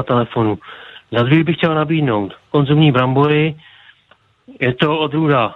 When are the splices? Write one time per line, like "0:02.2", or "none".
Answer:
none